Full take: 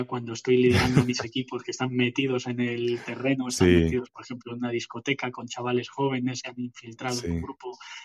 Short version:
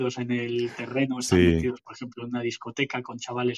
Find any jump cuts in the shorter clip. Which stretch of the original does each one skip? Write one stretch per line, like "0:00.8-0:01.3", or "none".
none